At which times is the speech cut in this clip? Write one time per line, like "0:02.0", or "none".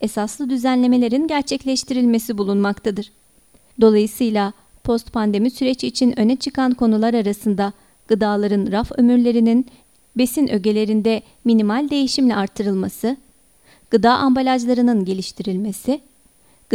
0:03.7

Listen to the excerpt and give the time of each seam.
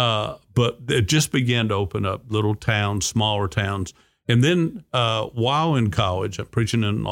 none

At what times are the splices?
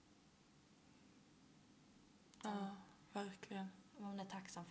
0:02.4

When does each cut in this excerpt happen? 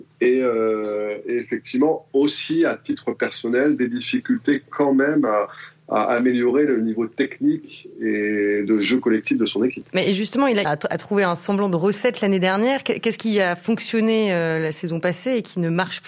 0:10.6

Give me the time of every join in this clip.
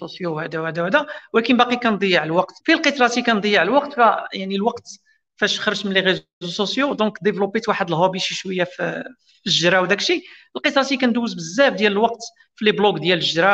0:02.6

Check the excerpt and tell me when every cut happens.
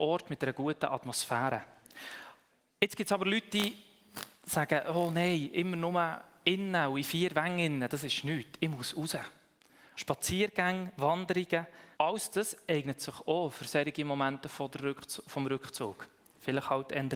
0:09.9
0:11.9

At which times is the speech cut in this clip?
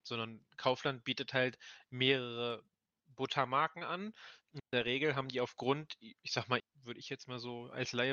0:06.6

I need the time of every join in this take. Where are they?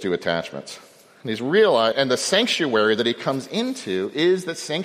0:01.9

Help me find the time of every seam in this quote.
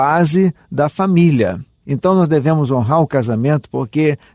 0:01.8

